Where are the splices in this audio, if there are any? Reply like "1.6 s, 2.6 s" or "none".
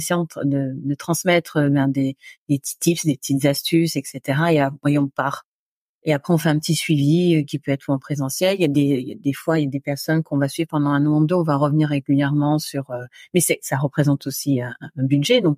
none